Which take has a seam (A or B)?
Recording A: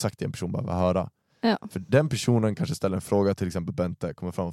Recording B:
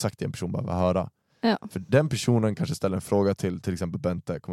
A